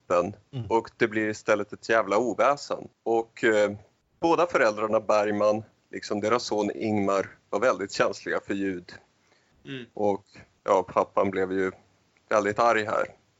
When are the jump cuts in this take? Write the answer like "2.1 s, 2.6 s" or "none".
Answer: 2.9 s